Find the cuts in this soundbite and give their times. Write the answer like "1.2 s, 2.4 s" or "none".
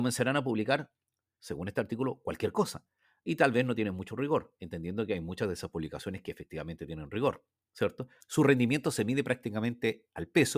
1.4 s, 8.2 s